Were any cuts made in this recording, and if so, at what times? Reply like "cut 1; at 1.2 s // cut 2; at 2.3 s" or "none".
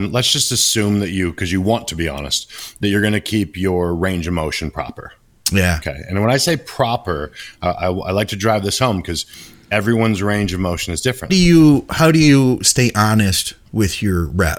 cut 1; at 11.3 s